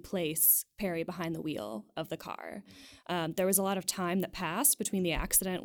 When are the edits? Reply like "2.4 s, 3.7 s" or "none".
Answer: none

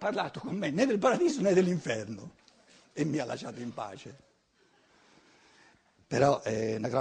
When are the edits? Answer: none

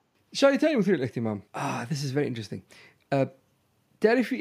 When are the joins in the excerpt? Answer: 1.5 s

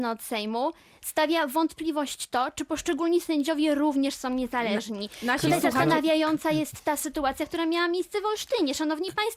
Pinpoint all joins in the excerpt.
none

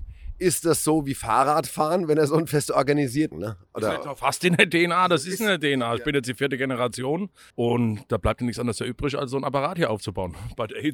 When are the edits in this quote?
3.3 s, 7.5 s

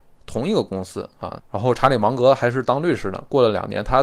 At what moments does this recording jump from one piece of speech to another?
1.4 s

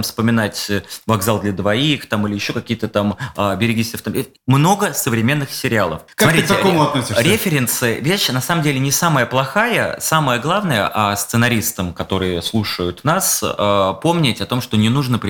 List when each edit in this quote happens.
6.1 s

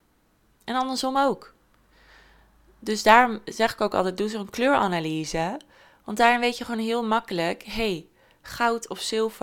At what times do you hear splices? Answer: none

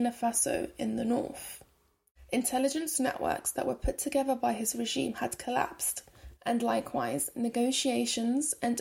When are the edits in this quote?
2.3 s

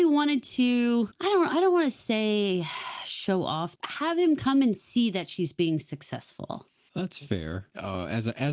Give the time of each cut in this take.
3.8 s

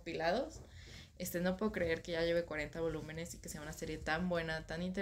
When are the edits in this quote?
none

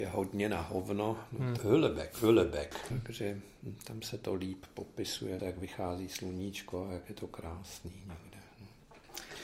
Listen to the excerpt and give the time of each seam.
1.6 s, 2.9 s, 5.4 s

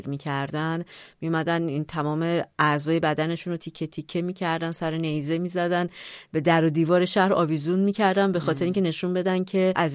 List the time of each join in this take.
3.6 s

